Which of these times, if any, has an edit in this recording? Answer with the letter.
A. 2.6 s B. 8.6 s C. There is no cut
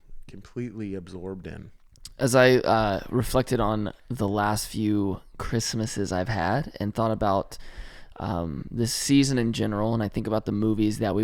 C